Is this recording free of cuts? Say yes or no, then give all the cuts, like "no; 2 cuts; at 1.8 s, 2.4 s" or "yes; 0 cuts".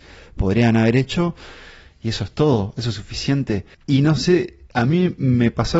no; 1 cut; at 3.7 s